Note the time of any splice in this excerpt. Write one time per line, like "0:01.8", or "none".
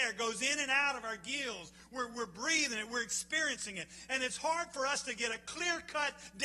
none